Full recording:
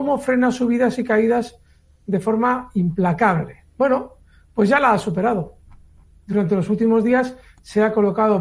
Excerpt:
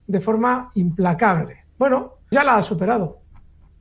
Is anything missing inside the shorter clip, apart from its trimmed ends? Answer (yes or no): yes